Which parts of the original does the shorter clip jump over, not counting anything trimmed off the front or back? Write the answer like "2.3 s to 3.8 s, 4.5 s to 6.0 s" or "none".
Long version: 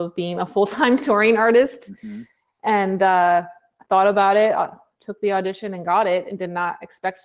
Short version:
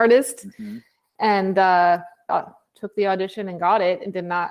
3.7 s to 4.5 s